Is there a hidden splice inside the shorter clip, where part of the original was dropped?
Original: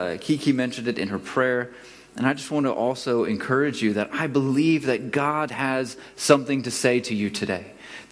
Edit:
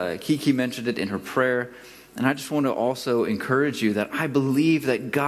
no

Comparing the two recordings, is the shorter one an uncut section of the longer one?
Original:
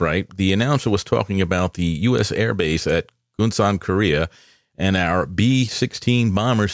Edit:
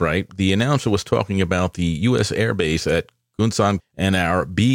no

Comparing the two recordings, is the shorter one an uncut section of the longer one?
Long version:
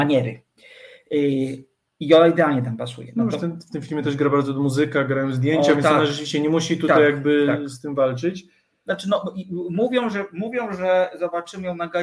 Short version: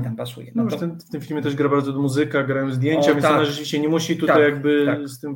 yes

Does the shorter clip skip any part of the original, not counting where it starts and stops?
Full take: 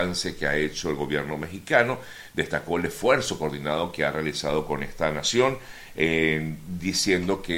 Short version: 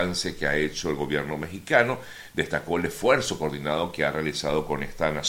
no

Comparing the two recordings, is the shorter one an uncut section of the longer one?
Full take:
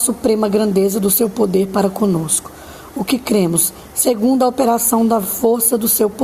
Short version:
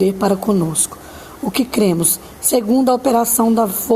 yes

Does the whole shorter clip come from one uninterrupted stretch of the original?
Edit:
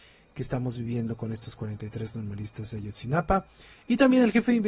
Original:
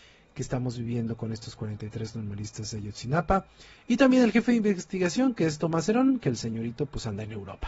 yes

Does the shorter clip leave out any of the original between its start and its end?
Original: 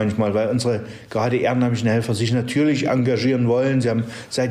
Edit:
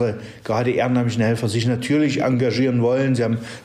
no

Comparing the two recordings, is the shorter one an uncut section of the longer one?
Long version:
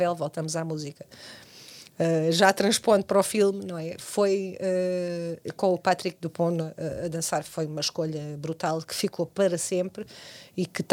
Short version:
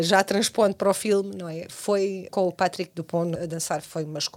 no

